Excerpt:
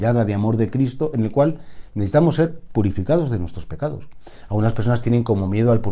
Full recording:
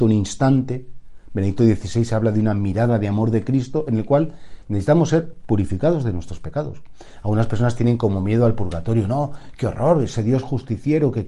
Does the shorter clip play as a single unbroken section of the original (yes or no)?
yes